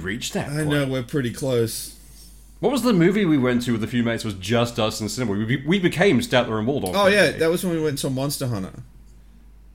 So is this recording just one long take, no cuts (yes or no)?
yes